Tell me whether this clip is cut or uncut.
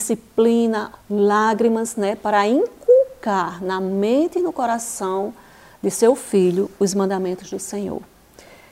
cut